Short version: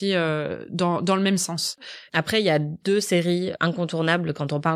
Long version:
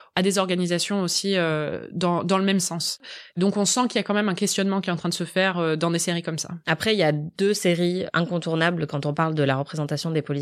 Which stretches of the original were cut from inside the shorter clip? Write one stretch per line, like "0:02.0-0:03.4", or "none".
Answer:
0:03.3-0:06.6